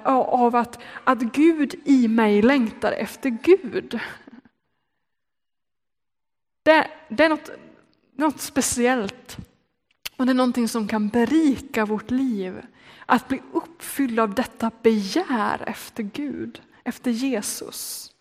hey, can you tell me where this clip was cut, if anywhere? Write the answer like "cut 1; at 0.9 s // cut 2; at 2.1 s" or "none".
none

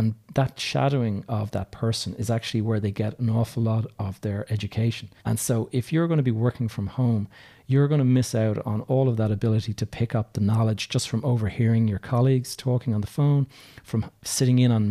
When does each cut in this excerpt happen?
cut 1; at 5.2 s

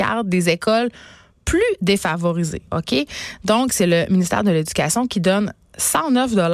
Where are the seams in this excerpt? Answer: none

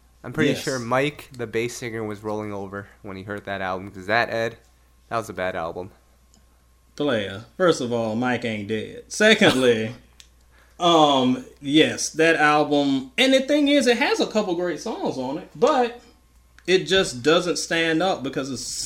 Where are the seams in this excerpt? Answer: none

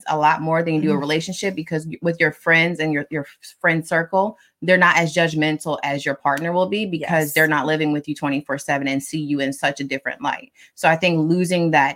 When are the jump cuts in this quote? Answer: none

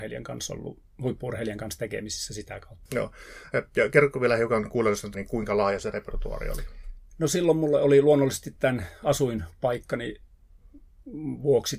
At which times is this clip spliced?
cut 1; at 2.9 s // cut 2; at 5.1 s

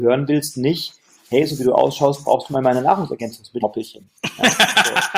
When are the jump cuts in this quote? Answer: cut 1; at 3.6 s

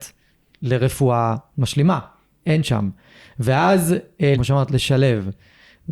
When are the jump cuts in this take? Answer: cut 1; at 2.4 s // cut 2; at 4.3 s

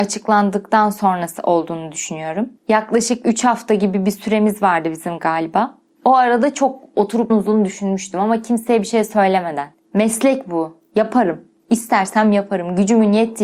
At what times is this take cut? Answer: cut 1; at 7.3 s // cut 2; at 9.7 s

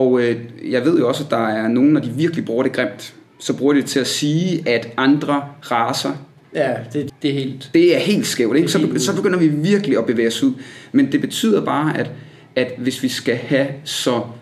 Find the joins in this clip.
cut 1; at 7.1 s

